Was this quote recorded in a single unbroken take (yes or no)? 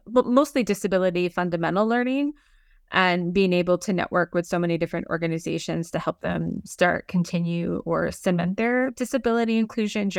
yes